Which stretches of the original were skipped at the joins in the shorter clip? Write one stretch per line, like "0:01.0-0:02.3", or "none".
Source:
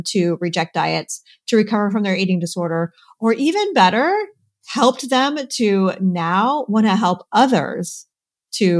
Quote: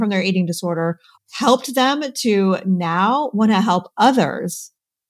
0:03.1-0:04.5